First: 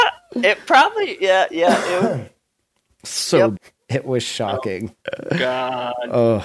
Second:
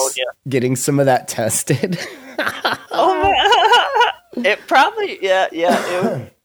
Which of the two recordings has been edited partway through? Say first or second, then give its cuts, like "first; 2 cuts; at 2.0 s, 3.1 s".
first; 2 cuts; at 3.6 s, 5.0 s